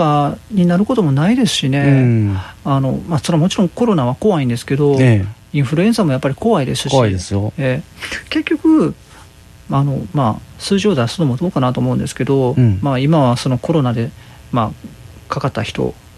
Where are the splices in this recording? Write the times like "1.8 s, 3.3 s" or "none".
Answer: none